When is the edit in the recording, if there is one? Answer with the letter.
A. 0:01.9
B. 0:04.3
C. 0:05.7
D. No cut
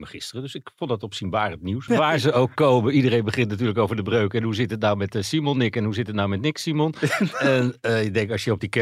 A